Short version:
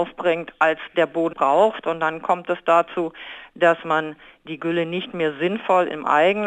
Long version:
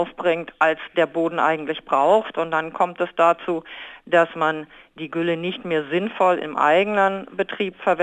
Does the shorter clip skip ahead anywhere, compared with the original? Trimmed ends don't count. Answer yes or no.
yes